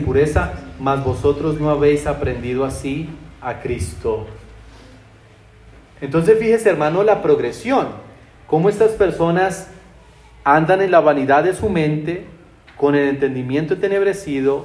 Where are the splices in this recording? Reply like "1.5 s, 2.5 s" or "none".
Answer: none